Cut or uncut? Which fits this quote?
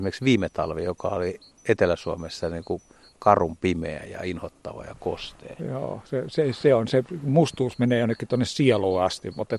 uncut